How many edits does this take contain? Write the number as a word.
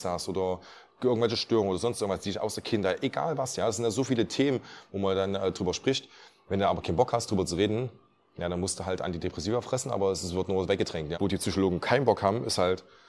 one